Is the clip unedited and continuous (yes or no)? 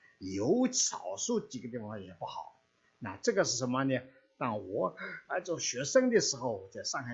yes